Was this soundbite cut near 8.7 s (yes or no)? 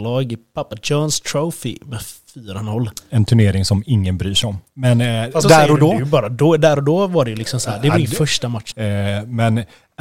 yes